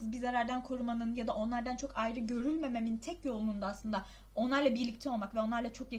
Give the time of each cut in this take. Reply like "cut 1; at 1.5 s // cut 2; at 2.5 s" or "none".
none